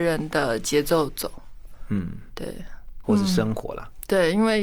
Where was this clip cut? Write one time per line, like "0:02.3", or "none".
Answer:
0:03.0

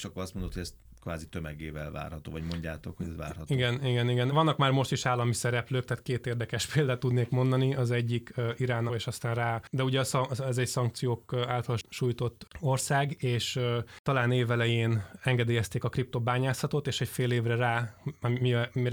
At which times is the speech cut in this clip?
0:04.3
0:08.9

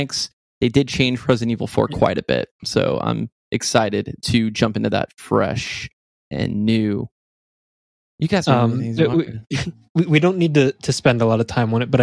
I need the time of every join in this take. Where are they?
0:08.1

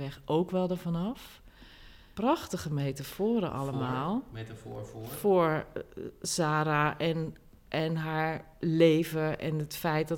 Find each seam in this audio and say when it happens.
none

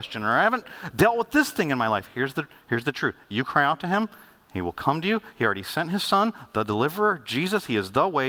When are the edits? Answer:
none

